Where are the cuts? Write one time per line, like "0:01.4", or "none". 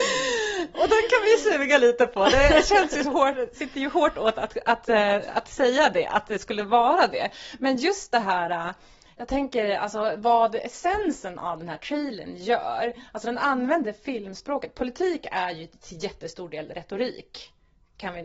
none